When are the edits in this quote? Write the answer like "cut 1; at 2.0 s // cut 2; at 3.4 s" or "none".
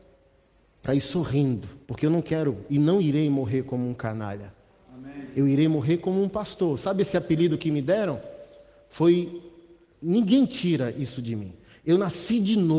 cut 1; at 1.8 s